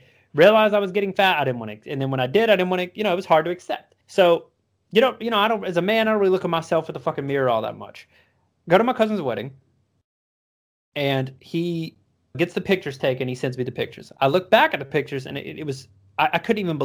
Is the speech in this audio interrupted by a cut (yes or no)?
yes